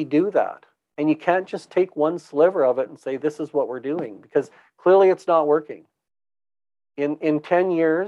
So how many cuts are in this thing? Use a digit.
0